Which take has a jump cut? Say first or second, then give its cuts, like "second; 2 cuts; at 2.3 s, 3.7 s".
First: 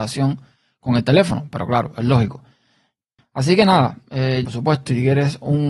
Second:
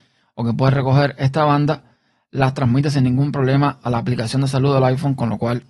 first; 2 cuts; at 3.2 s, 4.5 s